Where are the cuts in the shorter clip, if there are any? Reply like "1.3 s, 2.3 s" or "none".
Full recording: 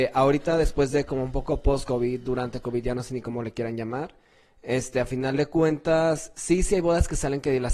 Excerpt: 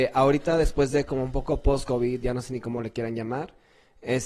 2.2 s